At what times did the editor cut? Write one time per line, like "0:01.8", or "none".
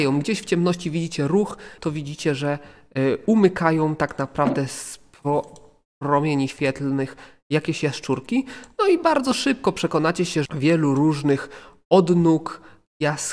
0:01.8
0:10.5